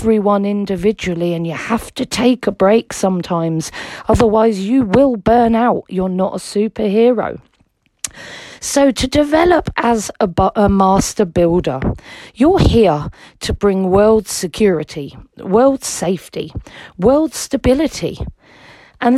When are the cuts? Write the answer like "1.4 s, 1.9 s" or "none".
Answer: none